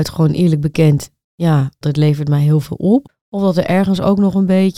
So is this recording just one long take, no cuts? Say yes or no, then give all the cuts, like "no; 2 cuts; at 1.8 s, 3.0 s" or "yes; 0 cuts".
no; 1 cut; at 1.8 s